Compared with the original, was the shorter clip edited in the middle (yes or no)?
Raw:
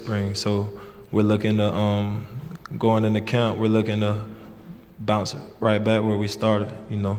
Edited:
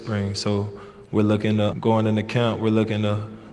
yes